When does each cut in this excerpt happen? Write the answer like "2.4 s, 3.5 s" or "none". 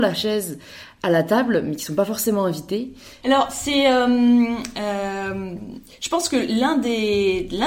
3.2 s